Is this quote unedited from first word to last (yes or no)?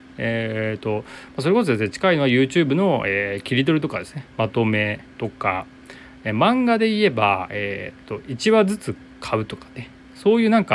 no